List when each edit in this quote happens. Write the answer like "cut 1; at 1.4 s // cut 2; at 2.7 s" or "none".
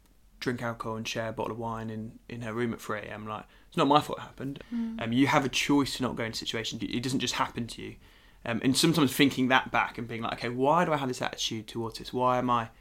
cut 1; at 4.6 s // cut 2; at 6.8 s